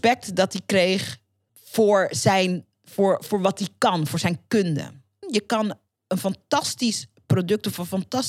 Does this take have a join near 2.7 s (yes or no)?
no